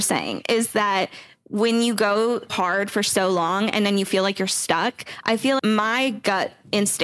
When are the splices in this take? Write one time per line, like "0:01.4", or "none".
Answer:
0:02.5
0:05.6